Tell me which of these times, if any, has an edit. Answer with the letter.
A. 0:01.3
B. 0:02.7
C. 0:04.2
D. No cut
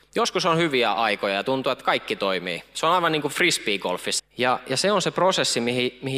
C